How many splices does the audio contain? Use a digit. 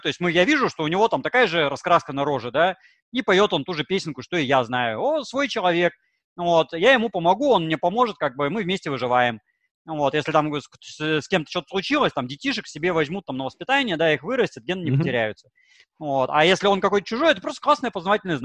0